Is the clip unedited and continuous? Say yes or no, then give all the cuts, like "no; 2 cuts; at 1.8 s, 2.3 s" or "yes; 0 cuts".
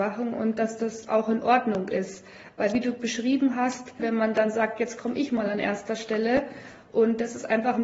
no; 1 cut; at 4.0 s